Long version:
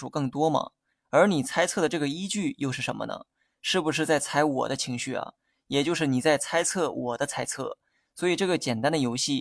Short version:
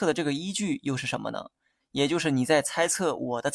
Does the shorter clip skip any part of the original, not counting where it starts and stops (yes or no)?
yes